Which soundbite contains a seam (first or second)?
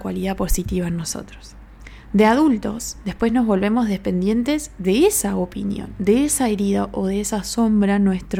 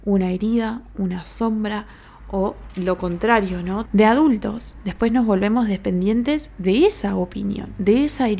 second